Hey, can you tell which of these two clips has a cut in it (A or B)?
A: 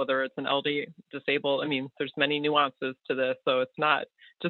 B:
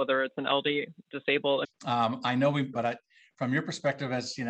B